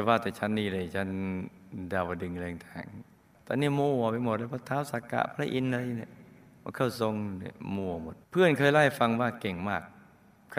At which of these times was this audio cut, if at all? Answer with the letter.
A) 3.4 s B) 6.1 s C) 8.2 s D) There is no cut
C